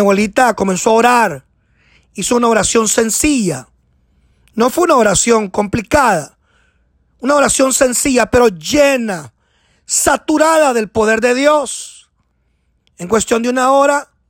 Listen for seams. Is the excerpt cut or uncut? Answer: uncut